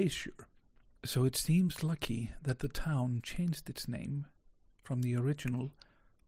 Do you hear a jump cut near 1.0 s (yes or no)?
yes